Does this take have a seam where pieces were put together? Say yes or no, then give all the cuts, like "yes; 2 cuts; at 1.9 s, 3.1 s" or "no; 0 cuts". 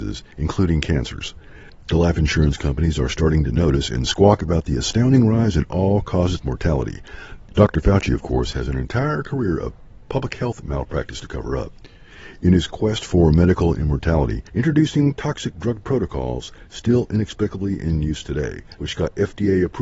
yes; 3 cuts; at 7.4 s, 14.5 s, 18.8 s